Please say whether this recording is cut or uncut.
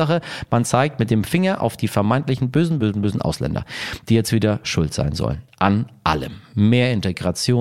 cut